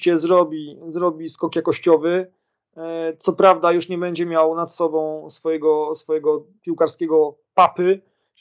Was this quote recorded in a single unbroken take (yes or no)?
yes